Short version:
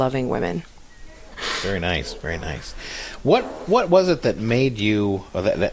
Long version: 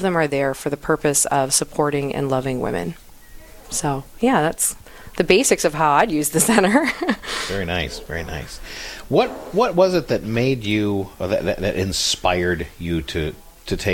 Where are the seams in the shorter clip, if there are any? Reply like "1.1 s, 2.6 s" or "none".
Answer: 1.3 s